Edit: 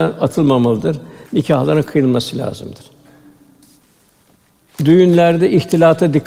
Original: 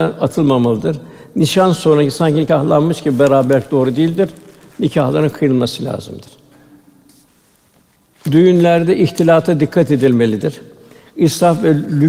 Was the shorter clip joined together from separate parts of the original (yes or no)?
yes